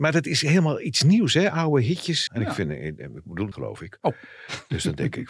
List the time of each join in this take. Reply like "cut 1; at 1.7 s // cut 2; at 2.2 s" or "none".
cut 1; at 2.3 s // cut 2; at 3.5 s